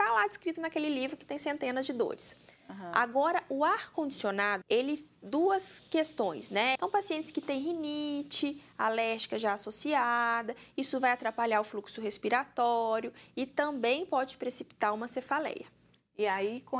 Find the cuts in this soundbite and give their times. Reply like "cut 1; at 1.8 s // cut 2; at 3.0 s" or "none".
cut 1; at 4.6 s // cut 2; at 6.8 s